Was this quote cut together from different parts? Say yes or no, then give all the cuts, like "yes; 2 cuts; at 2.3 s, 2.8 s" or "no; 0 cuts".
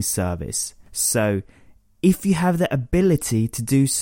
no; 0 cuts